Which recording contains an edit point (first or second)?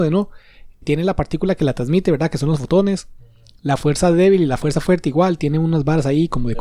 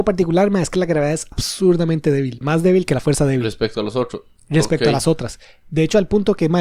second